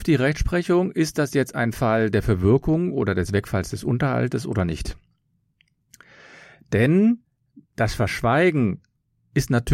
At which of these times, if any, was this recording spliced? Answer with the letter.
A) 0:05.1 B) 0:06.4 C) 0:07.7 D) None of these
C